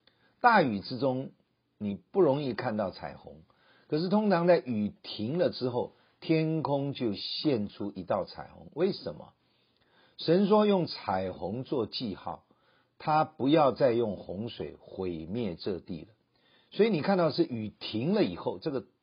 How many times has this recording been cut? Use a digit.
0